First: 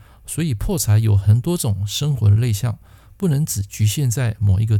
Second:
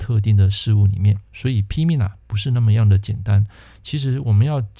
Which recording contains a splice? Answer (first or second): second